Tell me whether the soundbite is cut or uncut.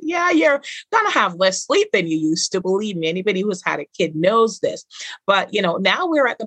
uncut